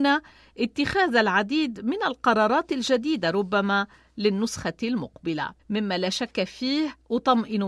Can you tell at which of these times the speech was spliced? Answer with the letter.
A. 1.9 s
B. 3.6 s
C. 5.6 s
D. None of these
C